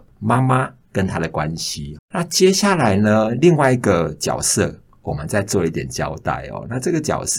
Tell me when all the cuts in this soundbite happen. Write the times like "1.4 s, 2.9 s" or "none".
2.0 s

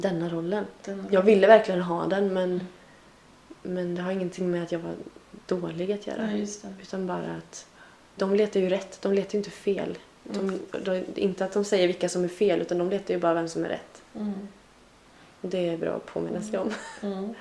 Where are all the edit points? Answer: 8.2 s

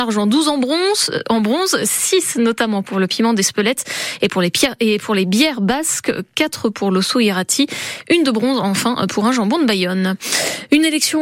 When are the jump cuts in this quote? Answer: none

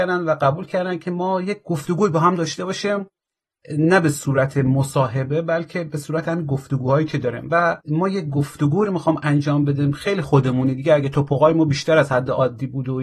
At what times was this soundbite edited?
7.8 s

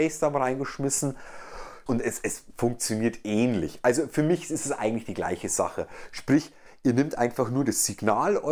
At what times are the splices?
1.9 s

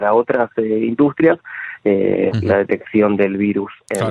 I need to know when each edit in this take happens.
2.3 s

